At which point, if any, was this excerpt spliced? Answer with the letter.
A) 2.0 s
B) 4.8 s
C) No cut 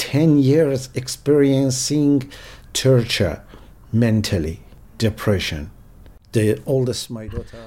B